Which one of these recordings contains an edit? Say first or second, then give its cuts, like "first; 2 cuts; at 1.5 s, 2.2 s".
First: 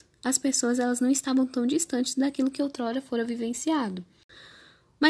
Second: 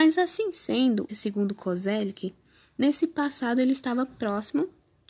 second; 1 cut; at 1.1 s